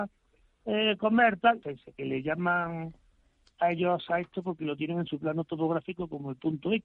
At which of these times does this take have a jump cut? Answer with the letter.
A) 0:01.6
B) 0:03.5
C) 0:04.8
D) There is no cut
A